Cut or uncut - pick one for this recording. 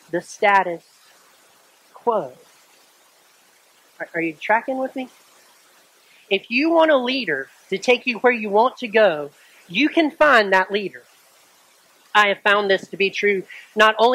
uncut